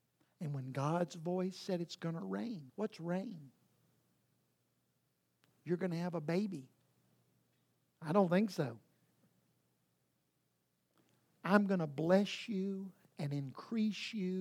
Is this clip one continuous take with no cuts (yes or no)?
no